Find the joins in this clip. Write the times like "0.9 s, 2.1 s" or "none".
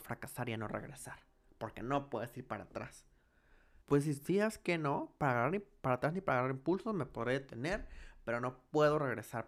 3.8 s